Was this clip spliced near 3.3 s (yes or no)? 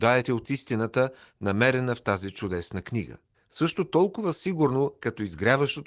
yes